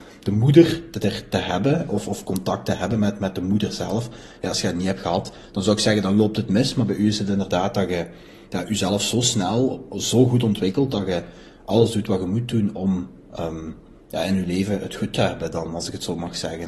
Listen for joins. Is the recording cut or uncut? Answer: uncut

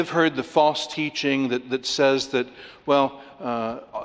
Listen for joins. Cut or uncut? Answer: uncut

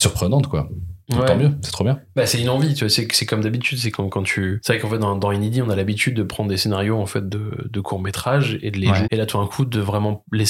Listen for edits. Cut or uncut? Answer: cut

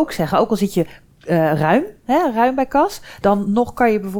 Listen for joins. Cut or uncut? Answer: uncut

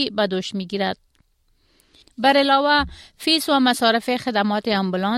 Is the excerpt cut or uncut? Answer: cut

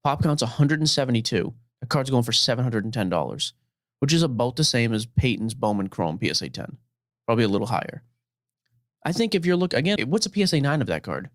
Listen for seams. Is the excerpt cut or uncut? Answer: cut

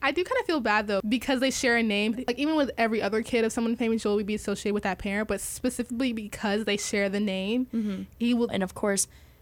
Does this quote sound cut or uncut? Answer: cut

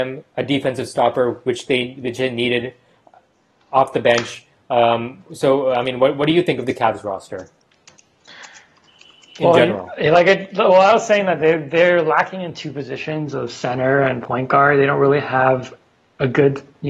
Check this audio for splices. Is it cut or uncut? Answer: uncut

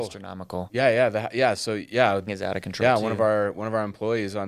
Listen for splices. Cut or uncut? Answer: cut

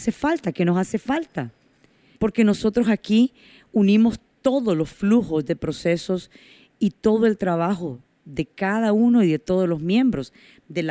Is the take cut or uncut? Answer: cut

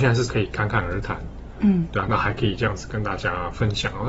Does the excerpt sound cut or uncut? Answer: cut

